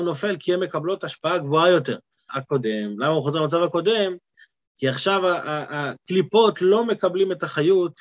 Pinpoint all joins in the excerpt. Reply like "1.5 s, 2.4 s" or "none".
2.3 s